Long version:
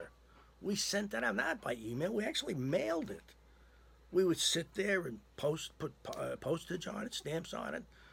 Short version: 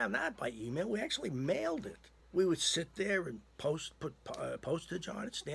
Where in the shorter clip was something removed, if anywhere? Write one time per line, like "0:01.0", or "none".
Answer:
0:02.2